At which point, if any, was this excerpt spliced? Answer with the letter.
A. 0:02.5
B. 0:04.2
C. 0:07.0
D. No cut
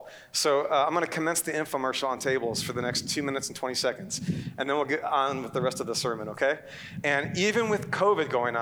C